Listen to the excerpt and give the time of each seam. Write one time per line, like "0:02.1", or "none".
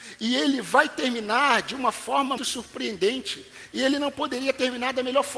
0:02.4